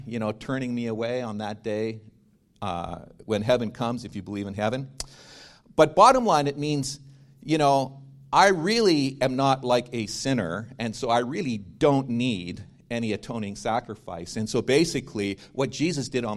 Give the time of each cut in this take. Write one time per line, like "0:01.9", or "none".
none